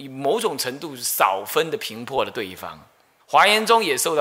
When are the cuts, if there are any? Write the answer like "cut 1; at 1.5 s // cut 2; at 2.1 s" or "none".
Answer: cut 1; at 3.2 s

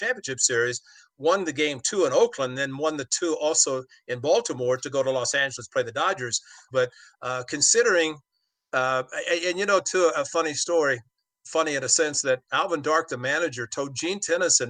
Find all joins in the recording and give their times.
cut 1; at 6.7 s

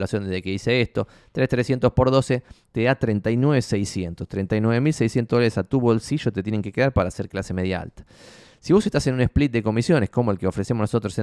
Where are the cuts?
none

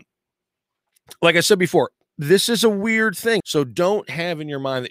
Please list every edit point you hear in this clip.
cut 1; at 3.4 s

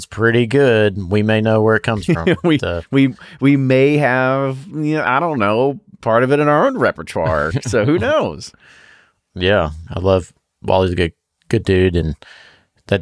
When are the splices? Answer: cut 1; at 9.9 s

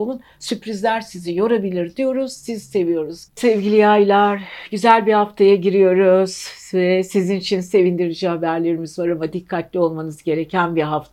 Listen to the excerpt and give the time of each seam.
cut 1; at 3.3 s

